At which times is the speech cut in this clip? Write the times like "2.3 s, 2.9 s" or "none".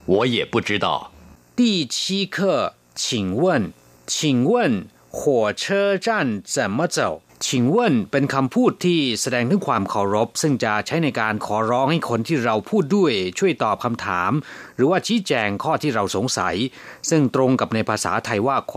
4.0 s, 7.3 s